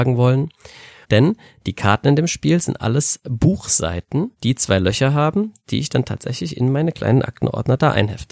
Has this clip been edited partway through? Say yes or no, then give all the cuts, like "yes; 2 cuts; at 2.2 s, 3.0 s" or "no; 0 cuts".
yes; 2 cuts; at 1.0 s, 4.3 s